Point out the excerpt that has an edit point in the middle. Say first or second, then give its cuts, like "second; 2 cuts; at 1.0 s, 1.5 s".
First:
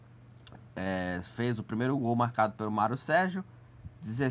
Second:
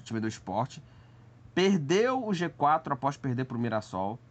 first; 1 cut; at 2.0 s